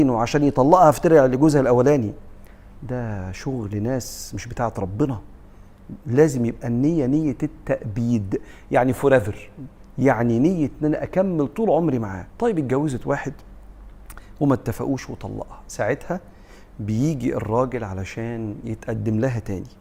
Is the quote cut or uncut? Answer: cut